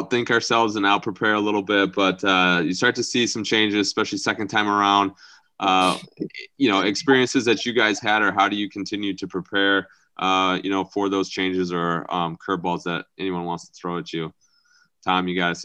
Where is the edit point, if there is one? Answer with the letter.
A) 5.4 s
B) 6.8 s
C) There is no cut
A